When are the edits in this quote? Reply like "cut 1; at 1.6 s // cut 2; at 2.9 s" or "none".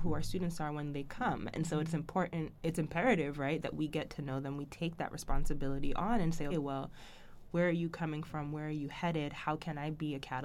cut 1; at 6.5 s